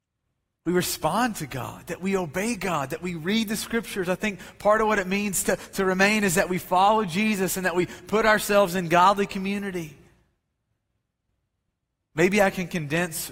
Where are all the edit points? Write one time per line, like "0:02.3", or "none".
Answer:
none